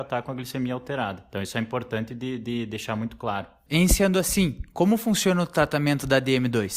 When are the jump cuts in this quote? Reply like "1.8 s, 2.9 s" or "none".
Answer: 3.7 s